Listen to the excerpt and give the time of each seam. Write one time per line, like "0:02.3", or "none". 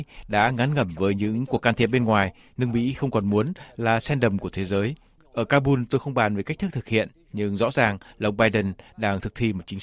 0:05.2